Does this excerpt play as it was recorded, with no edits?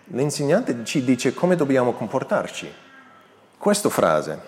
no; 1 cut; at 3.5 s

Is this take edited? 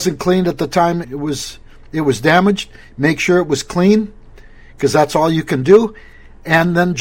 yes; 1 cut; at 1.0 s

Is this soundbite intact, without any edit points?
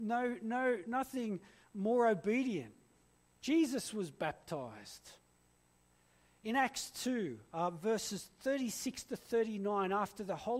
yes; 0 cuts

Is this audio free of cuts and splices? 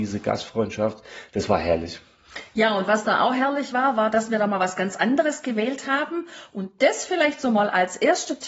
yes; 0 cuts

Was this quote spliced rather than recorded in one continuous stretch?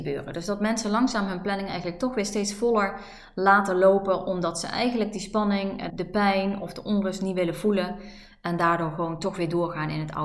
yes; 1 cut; at 5.9 s

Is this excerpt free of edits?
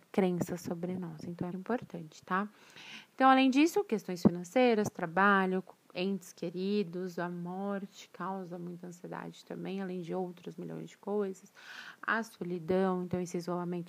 no; 1 cut; at 1.5 s

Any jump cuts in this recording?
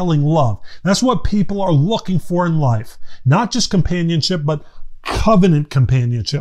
no; 0 cuts

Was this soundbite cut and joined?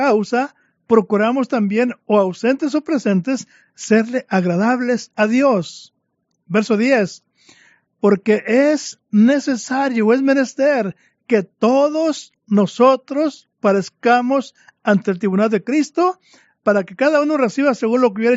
no; 0 cuts

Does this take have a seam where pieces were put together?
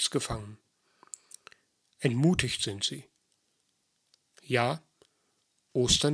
yes; 1 cut; at 4.3 s

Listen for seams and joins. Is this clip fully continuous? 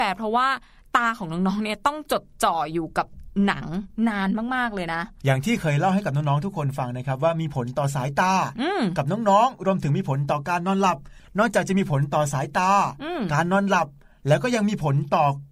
yes; 0 cuts

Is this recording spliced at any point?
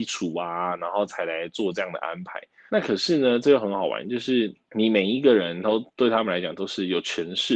yes; 2 cuts; at 2.7 s, 4.6 s

